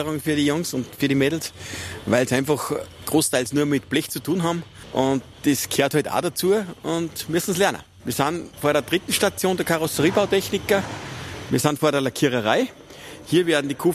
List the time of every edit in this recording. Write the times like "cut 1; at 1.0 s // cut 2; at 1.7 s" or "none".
none